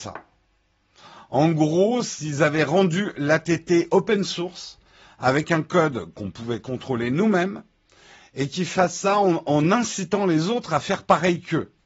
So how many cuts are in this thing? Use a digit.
0